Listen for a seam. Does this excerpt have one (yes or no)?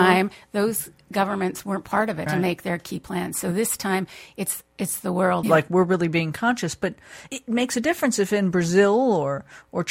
yes